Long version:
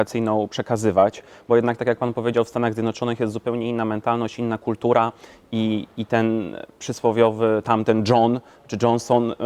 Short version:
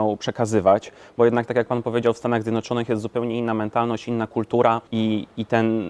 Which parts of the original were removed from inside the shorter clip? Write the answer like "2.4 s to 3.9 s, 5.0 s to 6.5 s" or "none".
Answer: 5.2 s to 5.5 s